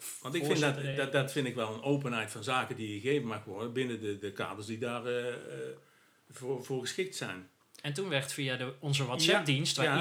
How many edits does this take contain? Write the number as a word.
zero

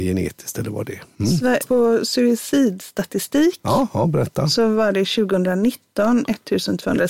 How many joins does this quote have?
one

